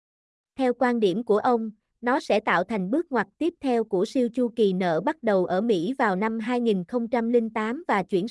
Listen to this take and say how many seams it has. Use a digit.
1